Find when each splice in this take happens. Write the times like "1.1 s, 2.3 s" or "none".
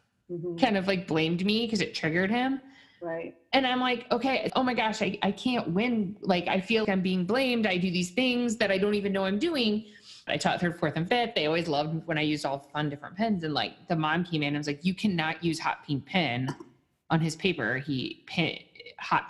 4.5 s, 6.8 s, 10.3 s